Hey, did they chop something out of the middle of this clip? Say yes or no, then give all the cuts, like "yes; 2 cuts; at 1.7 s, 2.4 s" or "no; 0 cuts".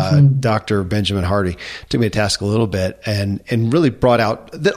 no; 0 cuts